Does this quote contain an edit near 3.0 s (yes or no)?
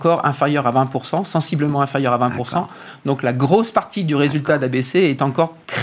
no